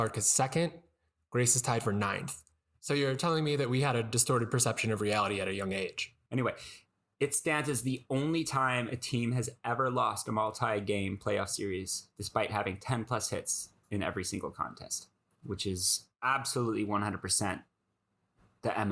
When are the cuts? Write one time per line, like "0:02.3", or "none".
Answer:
0:02.7
0:06.3